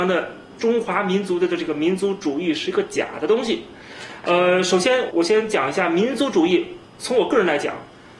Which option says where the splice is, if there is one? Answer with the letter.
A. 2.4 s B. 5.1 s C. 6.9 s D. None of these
B